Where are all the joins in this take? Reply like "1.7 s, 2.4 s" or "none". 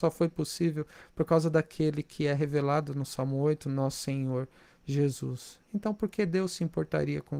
none